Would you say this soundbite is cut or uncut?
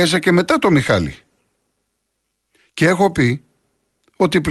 uncut